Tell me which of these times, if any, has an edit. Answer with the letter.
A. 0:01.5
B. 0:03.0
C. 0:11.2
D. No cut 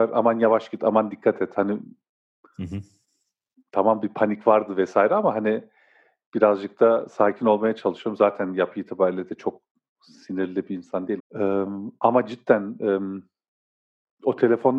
C